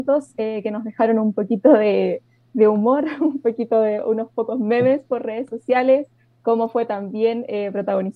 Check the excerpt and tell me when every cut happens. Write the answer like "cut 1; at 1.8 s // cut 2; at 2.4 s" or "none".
none

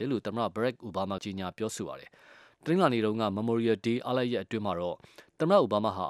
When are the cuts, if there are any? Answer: cut 1; at 1.2 s

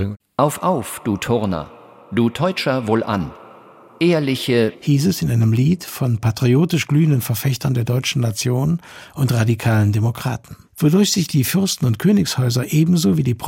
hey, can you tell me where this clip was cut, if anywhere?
cut 1; at 4.7 s // cut 2; at 10.6 s

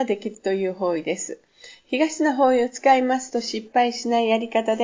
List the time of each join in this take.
none

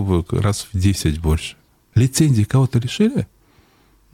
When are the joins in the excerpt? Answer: cut 1; at 1.8 s

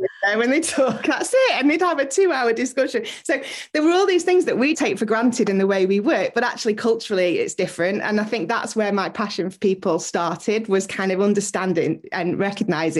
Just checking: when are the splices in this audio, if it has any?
cut 1; at 4.7 s

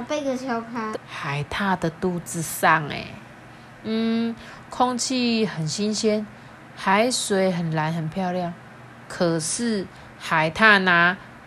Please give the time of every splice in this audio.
cut 1; at 0.9 s

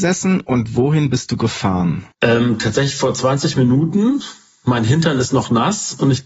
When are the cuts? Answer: cut 1; at 2.1 s

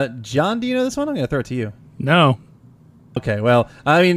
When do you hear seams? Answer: cut 1; at 3.2 s

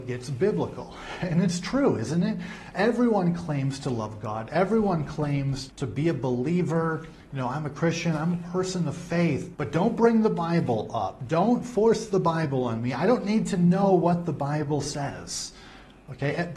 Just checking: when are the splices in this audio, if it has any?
cut 1; at 5.7 s // cut 2; at 9.5 s

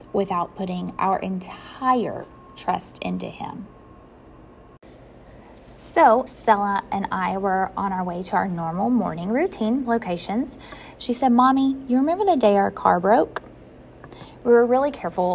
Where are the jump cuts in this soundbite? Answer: cut 1; at 6.3 s // cut 2; at 11.0 s

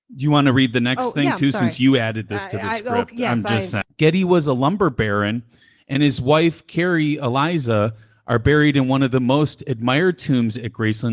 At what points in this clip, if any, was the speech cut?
cut 1; at 3.8 s

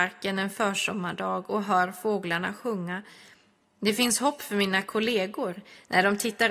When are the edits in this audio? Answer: none

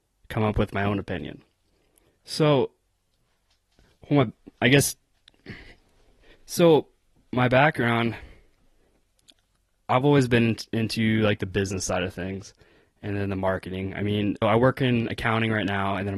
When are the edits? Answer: cut 1; at 14.4 s

